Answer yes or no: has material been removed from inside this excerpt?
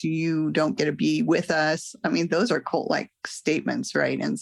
no